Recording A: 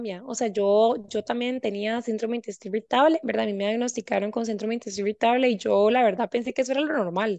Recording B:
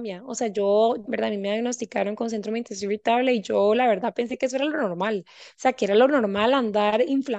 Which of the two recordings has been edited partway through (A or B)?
B